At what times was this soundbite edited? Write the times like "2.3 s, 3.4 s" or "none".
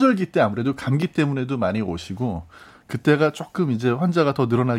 none